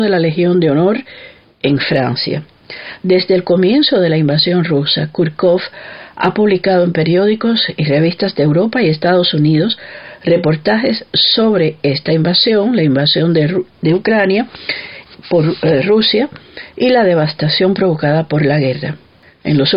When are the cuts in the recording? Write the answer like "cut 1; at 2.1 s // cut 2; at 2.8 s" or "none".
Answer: none